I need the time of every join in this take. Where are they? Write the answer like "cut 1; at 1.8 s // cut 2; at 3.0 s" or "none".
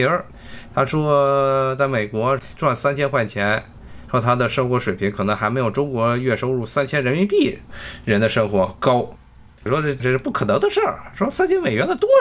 cut 1; at 4.1 s // cut 2; at 9.6 s